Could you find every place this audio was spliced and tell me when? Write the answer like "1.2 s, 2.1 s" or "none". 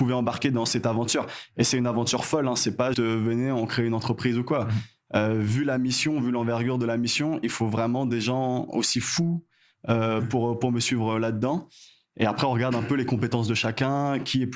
2.9 s